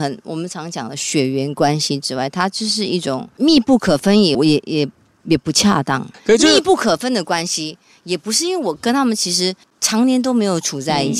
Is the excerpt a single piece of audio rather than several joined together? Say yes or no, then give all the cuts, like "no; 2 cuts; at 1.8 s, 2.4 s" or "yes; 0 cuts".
no; 1 cut; at 4.3 s